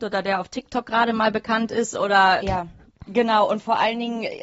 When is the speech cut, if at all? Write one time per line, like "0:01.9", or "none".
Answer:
0:02.4